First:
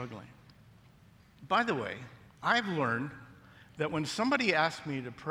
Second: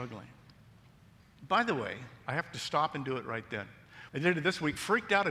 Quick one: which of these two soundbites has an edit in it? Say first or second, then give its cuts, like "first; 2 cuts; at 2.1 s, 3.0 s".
second; 2 cuts; at 2.2 s, 4.1 s